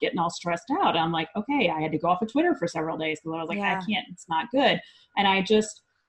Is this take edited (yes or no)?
no